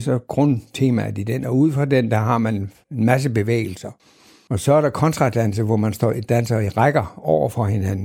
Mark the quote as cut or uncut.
uncut